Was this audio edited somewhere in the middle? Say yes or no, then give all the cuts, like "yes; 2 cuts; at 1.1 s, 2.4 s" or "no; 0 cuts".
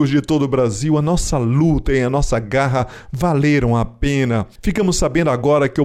no; 0 cuts